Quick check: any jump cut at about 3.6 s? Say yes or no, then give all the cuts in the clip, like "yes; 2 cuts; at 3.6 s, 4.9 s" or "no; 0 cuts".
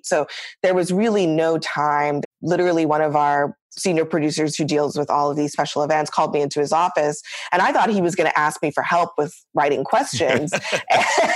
yes; 2 cuts; at 2.2 s, 3.6 s